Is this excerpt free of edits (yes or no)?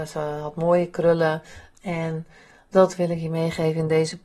no